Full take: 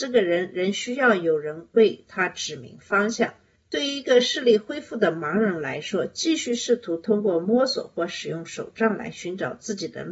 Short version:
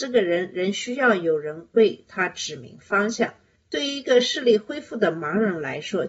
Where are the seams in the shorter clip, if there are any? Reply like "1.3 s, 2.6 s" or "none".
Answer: none